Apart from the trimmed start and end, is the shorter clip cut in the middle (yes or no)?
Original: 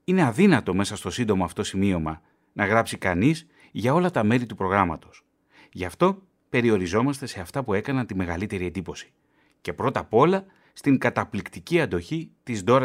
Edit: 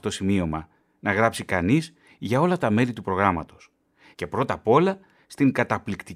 yes